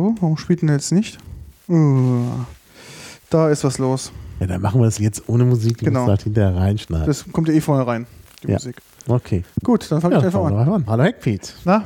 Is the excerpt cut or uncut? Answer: cut